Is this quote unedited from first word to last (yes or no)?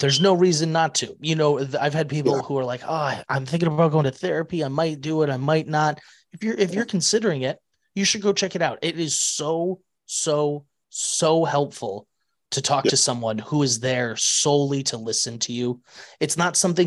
yes